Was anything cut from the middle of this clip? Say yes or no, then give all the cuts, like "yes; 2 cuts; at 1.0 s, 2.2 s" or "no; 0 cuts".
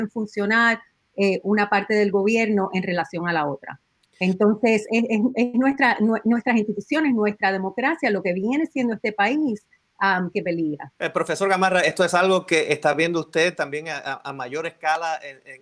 yes; 1 cut; at 11.0 s